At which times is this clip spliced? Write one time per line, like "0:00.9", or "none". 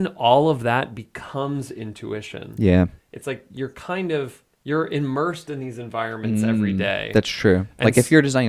0:03.0
0:04.5